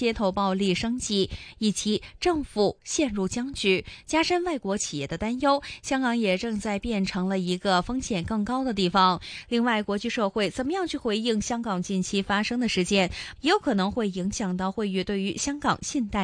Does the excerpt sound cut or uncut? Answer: cut